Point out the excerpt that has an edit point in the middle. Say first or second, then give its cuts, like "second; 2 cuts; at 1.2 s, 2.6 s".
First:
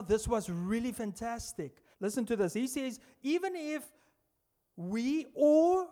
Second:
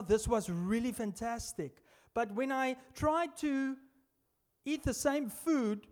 first; 1 cut; at 1.9 s